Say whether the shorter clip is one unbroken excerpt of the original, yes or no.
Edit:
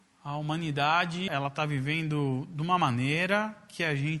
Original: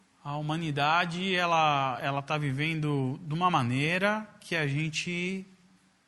no